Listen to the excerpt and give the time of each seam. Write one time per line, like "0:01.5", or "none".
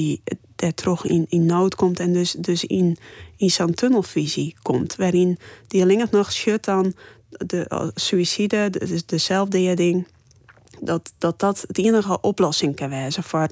none